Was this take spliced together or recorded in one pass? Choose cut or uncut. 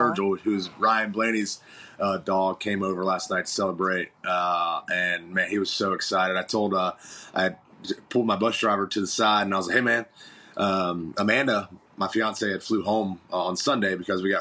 uncut